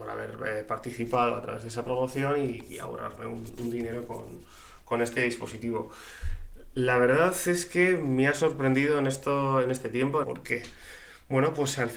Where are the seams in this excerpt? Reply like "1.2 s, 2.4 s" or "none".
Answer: 10.2 s